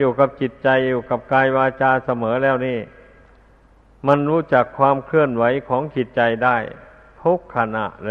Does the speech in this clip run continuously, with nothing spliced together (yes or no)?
yes